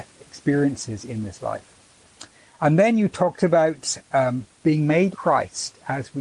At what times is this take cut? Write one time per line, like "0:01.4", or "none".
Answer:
0:04.0
0:05.1